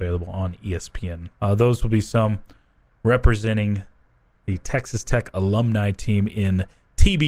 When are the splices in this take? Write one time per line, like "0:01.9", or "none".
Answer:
0:01.3